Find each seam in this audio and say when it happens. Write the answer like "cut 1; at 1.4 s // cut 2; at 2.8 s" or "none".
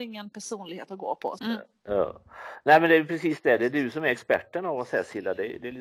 cut 1; at 1.4 s